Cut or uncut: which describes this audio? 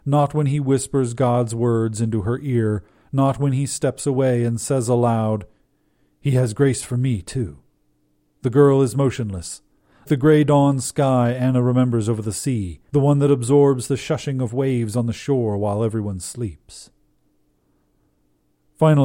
cut